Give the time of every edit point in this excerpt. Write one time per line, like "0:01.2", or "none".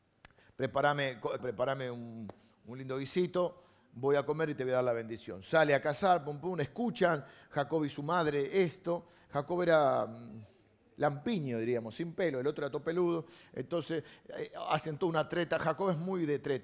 0:01.4